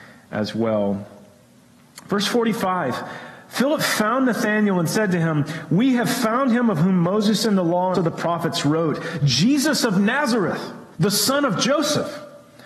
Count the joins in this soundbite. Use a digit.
2